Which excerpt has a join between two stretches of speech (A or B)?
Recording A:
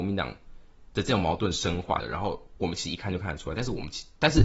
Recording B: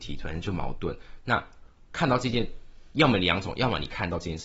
A